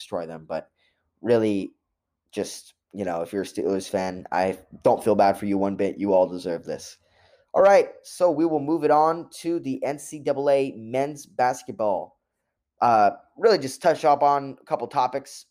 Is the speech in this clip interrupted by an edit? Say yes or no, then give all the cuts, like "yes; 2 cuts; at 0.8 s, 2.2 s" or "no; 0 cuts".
no; 0 cuts